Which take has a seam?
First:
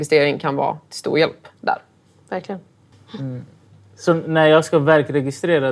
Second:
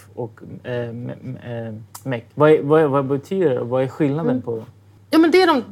second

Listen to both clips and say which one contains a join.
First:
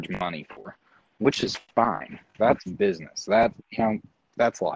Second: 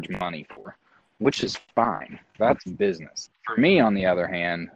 second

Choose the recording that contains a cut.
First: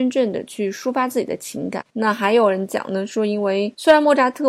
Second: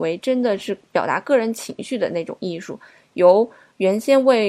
first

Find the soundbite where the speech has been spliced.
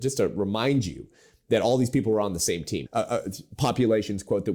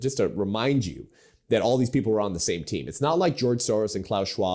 first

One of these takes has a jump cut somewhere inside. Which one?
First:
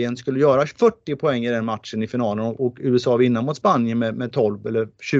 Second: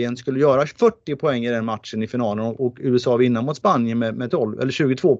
second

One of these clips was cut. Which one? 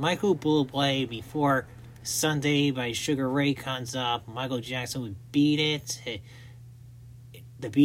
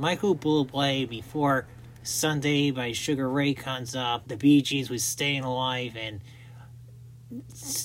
second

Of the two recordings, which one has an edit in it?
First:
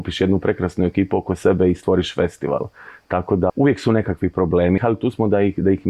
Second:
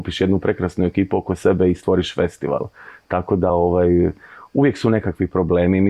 first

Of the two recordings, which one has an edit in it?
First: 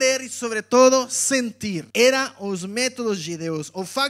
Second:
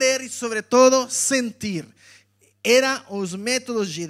first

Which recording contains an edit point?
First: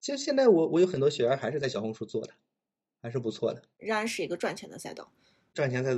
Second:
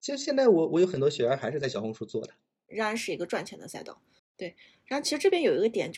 second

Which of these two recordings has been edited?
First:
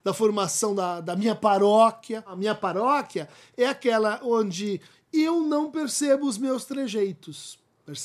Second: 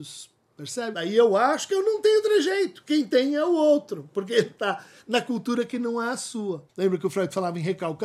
second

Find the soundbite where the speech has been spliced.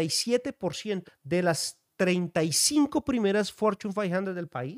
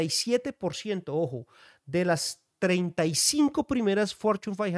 first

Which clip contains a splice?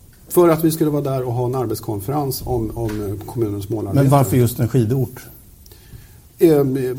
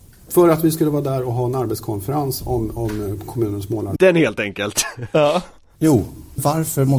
second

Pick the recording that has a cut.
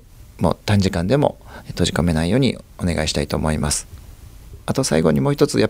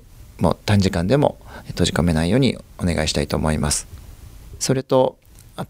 second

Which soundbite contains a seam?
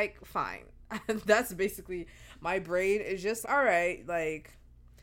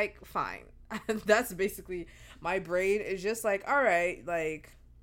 first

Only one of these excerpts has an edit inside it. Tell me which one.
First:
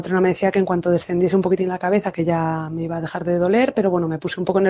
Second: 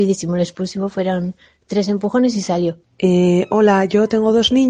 second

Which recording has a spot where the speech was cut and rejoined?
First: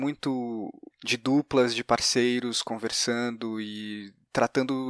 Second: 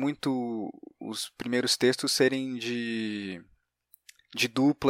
first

